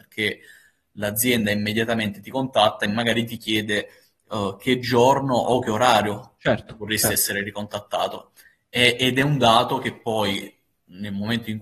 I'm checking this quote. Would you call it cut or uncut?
uncut